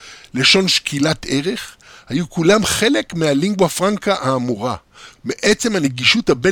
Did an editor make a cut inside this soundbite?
yes; 1 cut; at 5.2 s

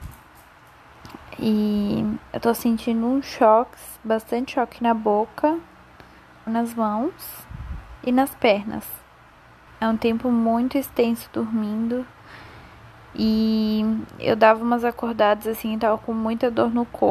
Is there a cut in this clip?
yes; 2 cuts; at 6.5 s, 9.7 s

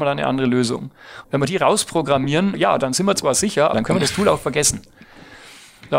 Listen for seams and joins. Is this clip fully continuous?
no; 3 cuts; at 1.2 s, 2.5 s, 3.7 s

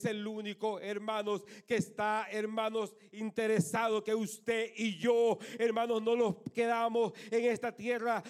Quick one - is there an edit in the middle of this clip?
no; 0 cuts

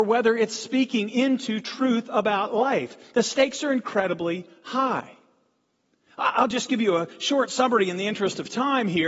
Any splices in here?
no; 0 cuts

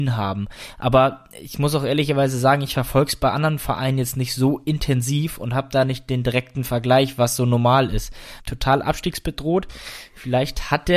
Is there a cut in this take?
yes; 1 cut; at 8.4 s

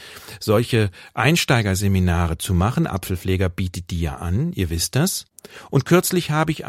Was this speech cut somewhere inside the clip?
no; 0 cuts

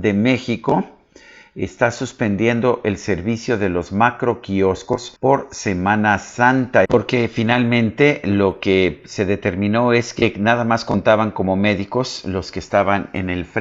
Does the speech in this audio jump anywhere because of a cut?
yes; 2 cuts; at 5.2 s, 6.8 s

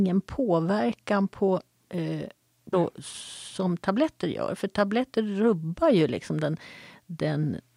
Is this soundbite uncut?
no; 1 cut; at 2.7 s

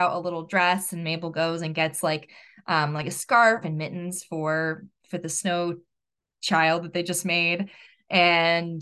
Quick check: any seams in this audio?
yes; 1 cut; at 3.6 s

